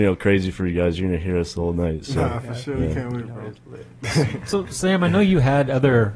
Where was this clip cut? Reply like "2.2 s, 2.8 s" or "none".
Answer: none